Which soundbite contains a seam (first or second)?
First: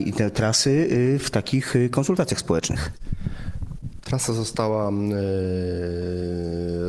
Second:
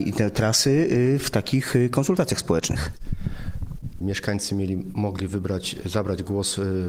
second